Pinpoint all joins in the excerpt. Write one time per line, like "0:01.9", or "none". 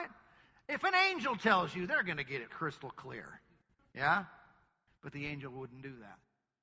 0:02.5